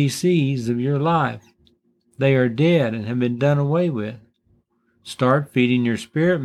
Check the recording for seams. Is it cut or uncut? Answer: uncut